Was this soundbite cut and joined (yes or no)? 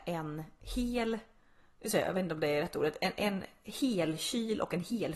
no